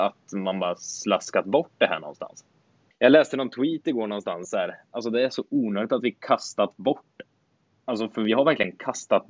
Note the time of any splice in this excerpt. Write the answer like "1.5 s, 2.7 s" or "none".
2.9 s